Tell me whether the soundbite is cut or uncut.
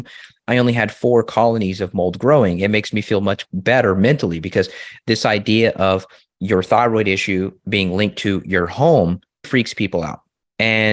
cut